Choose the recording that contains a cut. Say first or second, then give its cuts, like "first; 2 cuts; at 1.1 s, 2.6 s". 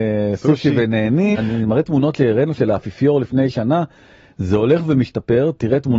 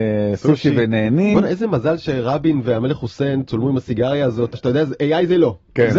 first; 1 cut; at 1.3 s